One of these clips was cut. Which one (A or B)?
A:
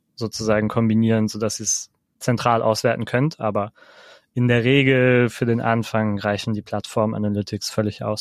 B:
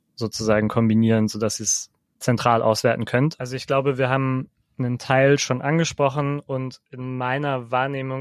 B